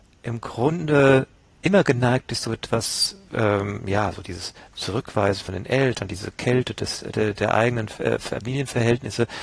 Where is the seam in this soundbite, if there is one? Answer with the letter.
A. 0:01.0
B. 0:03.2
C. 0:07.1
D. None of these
D